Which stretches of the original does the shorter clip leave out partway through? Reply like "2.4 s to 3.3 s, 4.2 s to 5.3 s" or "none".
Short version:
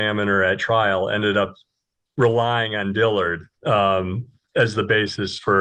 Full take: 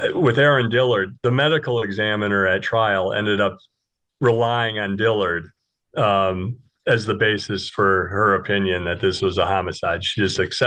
5.6 s to 5.9 s